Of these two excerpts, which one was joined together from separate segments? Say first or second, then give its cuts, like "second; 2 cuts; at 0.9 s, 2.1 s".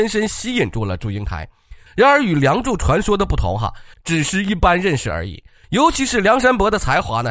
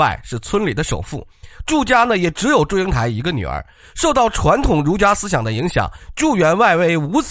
first; 3 cuts; at 1.9 s, 3.9 s, 5.6 s